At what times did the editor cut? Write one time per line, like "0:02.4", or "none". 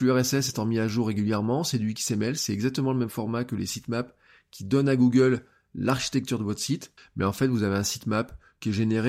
0:07.0